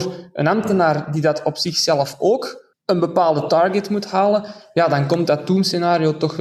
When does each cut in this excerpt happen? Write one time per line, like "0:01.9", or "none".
0:02.7